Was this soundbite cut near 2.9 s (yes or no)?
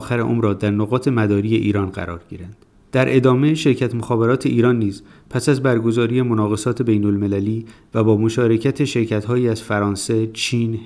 no